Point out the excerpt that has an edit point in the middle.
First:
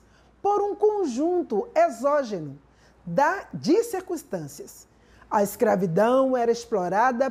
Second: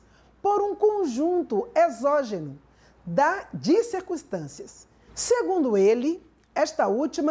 second; 1 cut; at 5.1 s

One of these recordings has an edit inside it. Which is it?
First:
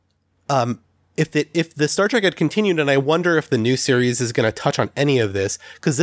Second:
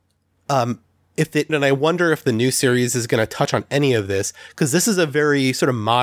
second; 1 cut; at 1.5 s

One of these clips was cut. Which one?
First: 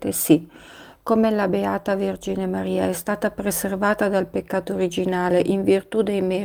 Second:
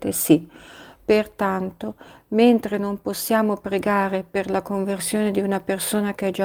second; 1 cut; at 1.0 s

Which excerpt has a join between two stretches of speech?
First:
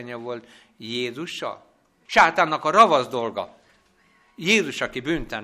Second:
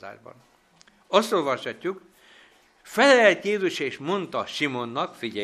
first; 1 cut; at 2.1 s

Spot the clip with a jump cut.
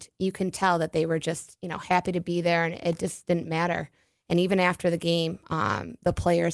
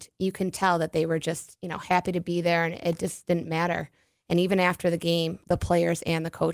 second; 1 cut; at 5.4 s

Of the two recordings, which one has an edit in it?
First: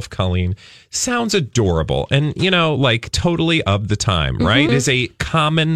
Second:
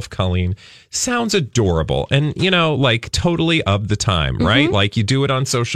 first; 1 cut; at 4.7 s

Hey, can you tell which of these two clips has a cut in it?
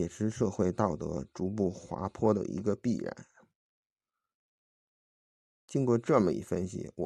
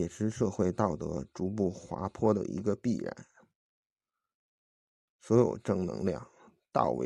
second; 1 cut; at 5.1 s

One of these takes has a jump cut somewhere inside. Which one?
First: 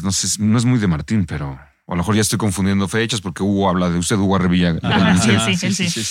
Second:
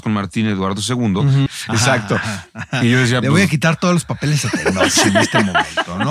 second; 1 cut; at 1.5 s

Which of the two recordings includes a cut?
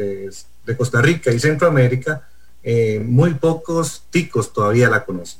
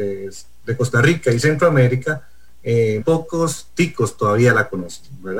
second; 1 cut; at 3.0 s

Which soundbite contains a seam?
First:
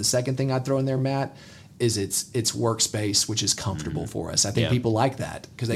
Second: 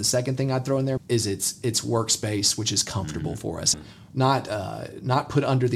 second; 2 cuts; at 1.0 s, 3.7 s

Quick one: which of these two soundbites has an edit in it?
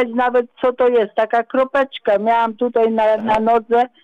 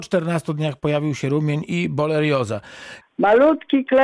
second; 1 cut; at 3.0 s

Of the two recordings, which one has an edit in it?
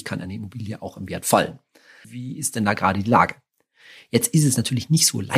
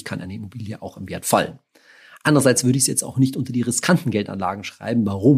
first; 1 cut; at 2.0 s

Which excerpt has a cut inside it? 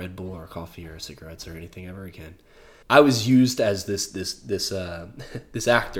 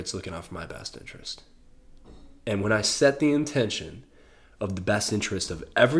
first; 1 cut; at 2.8 s

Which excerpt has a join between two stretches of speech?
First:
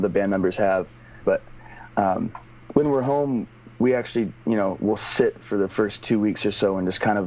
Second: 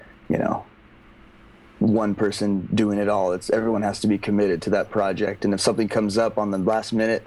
first; 1 cut; at 1.2 s

